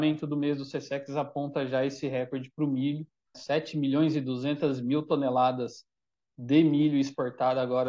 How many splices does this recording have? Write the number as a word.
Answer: one